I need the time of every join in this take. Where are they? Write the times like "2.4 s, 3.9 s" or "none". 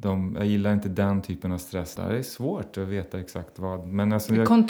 2.0 s